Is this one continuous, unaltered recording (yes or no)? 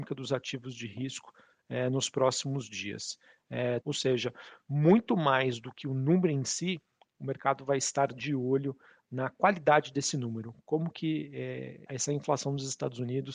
no